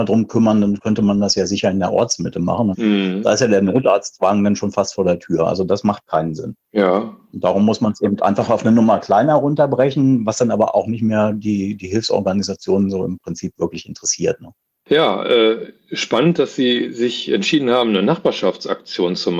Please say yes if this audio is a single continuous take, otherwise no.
no